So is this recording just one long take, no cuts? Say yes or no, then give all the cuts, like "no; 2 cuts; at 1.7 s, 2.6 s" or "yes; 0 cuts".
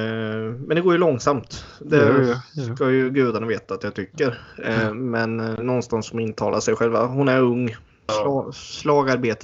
no; 1 cut; at 8.1 s